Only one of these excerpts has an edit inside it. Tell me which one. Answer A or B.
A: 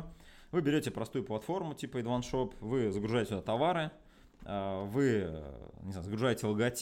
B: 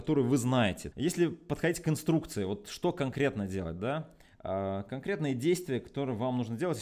B